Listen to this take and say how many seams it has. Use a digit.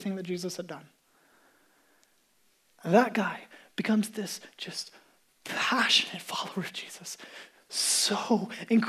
0